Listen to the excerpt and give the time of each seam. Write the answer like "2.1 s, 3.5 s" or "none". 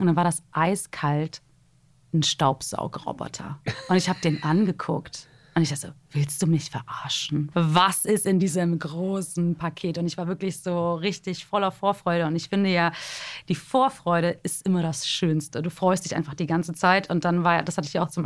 7.5 s